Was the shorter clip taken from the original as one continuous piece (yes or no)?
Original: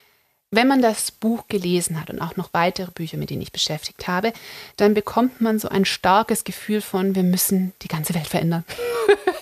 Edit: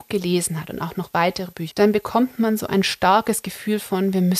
no